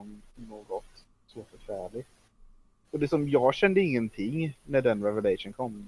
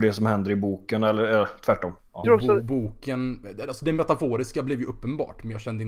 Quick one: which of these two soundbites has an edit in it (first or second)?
second